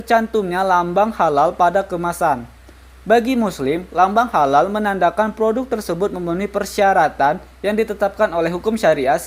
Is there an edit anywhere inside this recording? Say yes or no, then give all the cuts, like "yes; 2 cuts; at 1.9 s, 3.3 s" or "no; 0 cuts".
no; 0 cuts